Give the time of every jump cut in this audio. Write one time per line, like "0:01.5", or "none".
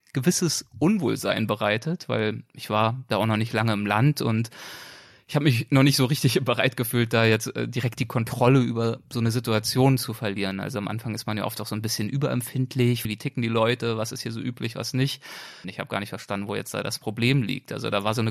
0:13.0
0:15.6